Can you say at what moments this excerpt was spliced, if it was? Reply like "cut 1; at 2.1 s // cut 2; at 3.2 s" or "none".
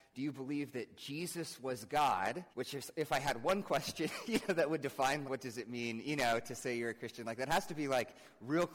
cut 1; at 2.5 s // cut 2; at 5.2 s